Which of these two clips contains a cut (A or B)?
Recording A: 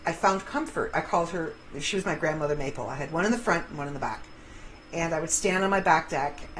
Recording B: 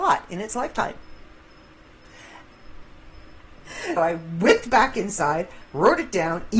B